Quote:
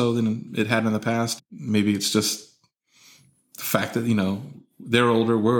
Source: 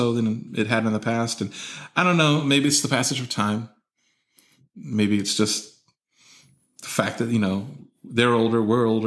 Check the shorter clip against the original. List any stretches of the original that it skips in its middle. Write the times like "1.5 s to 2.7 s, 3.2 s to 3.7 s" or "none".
1.4 s to 4.6 s